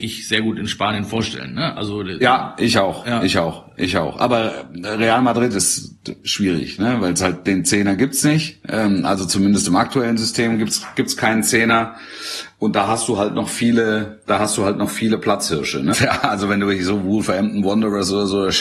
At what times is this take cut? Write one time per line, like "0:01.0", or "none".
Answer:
0:15.9